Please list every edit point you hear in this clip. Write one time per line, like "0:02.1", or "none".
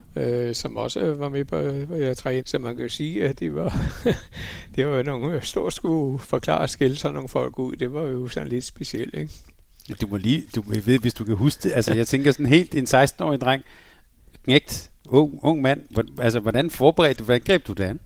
0:02.4